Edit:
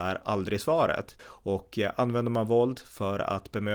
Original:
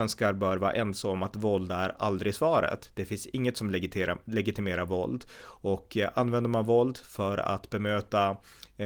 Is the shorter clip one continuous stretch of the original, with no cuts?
no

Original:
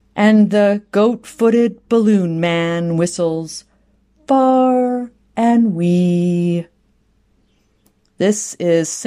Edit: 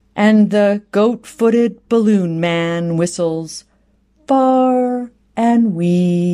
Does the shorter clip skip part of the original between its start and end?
no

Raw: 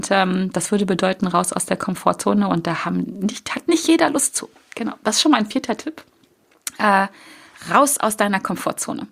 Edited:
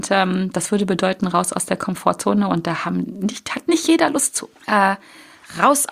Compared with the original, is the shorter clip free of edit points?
no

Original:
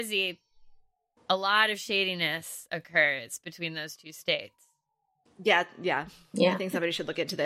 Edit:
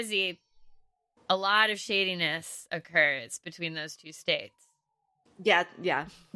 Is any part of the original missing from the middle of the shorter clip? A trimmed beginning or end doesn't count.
no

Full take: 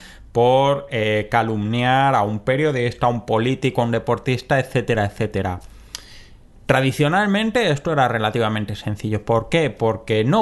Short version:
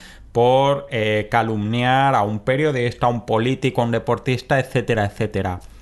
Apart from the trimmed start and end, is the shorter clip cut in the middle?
no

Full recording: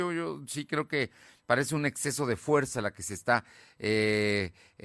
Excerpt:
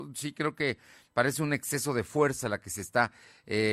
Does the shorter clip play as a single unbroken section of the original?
yes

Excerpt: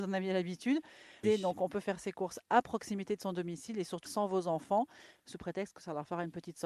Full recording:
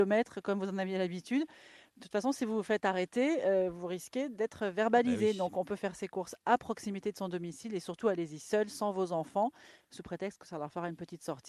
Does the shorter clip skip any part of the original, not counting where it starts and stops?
yes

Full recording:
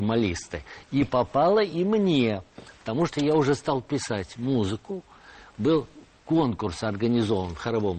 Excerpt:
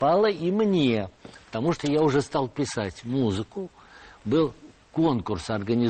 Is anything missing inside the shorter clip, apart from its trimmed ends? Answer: no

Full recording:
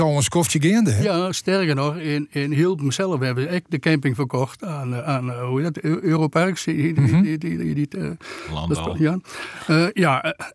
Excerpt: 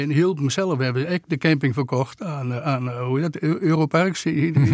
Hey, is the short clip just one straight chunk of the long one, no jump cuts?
yes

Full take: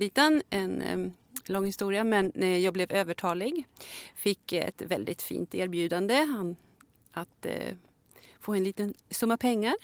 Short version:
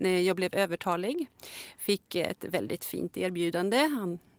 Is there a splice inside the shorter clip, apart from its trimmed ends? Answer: no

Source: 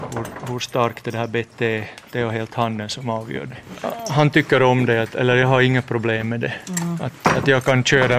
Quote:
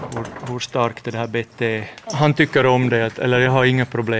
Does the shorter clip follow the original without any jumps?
no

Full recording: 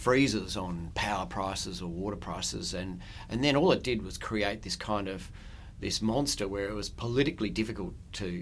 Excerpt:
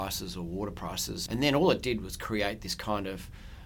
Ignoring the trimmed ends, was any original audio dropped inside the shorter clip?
yes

